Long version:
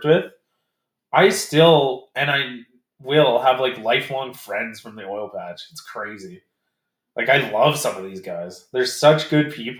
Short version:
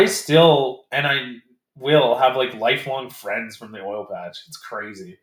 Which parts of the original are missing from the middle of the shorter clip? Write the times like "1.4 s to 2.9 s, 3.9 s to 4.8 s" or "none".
none